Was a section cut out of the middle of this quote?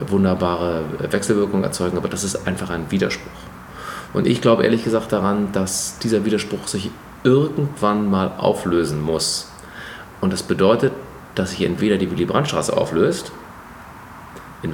no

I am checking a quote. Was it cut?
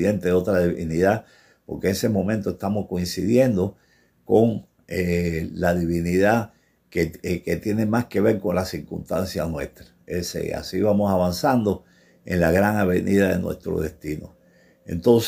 no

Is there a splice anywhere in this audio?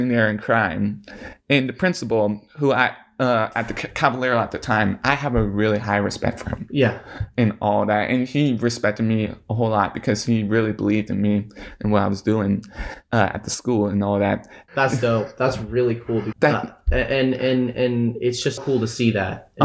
yes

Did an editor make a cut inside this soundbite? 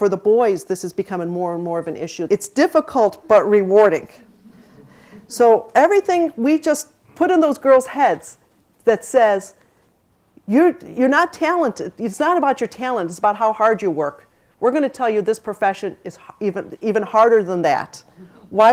yes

